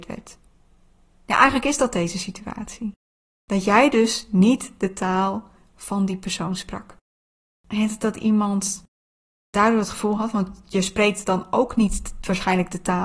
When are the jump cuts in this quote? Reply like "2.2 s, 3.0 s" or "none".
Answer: none